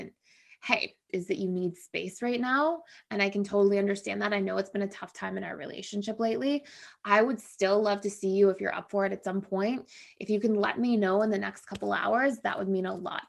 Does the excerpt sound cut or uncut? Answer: cut